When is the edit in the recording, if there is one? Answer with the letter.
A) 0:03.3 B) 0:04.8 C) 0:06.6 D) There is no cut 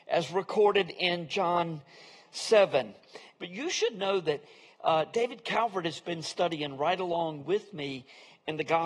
A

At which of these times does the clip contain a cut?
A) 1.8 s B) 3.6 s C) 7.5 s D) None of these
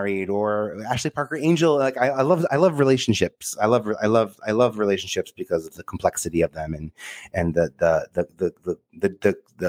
D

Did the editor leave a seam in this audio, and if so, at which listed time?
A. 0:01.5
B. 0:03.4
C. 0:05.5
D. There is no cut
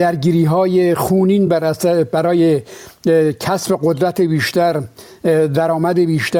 D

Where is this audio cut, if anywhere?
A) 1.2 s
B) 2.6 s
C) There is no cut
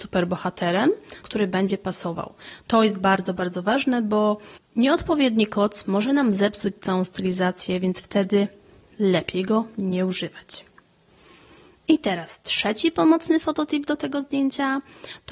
A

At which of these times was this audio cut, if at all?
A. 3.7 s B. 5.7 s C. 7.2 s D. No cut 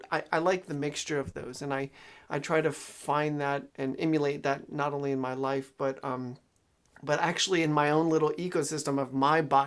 A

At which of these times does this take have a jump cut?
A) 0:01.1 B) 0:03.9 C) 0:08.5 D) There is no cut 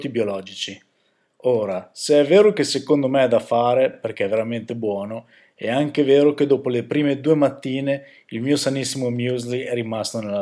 D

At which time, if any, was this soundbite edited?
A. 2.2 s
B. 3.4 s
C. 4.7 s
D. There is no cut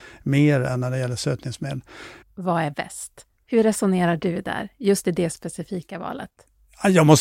A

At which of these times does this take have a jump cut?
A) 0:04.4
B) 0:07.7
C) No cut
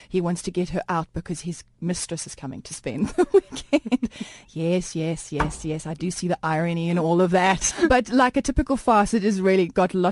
B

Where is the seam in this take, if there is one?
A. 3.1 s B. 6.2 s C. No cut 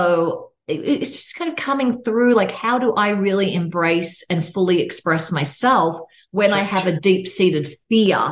C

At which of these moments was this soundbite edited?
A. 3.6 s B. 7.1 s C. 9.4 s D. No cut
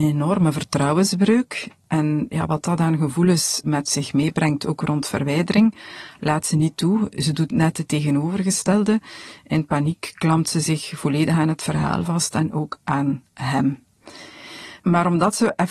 A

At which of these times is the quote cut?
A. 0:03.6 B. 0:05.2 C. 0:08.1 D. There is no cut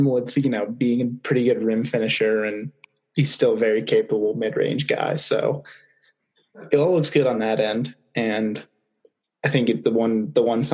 D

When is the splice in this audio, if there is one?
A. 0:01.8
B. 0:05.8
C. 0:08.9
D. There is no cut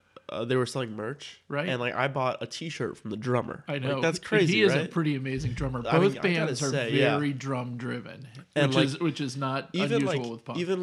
D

